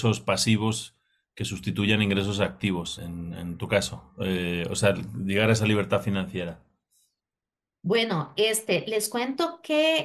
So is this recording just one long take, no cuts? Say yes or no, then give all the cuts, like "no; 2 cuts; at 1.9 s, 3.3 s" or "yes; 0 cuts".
no; 1 cut; at 3.0 s